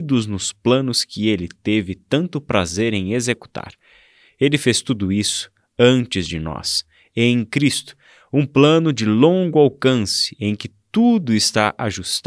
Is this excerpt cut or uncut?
uncut